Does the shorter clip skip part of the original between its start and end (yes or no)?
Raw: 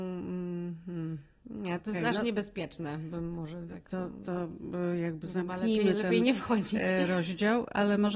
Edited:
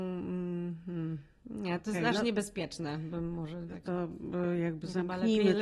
yes